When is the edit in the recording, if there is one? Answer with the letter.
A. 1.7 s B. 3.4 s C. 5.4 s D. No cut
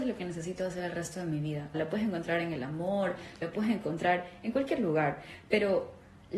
A